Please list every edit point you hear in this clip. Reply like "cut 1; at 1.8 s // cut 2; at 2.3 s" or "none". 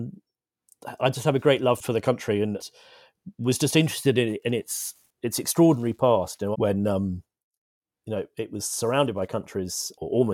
cut 1; at 6.5 s